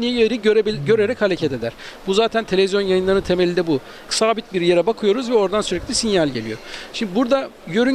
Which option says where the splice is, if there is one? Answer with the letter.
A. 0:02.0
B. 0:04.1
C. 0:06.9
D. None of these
B